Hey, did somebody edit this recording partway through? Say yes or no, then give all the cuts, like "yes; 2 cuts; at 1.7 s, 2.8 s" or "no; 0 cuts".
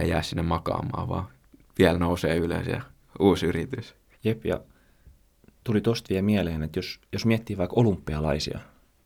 yes; 1 cut; at 4.1 s